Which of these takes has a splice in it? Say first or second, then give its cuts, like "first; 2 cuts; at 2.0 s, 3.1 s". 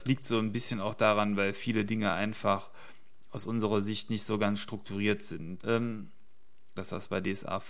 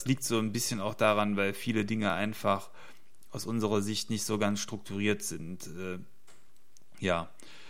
first; 2 cuts; at 5.6 s, 6.8 s